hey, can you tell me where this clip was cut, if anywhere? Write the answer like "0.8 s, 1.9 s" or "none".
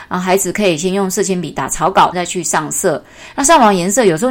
2.1 s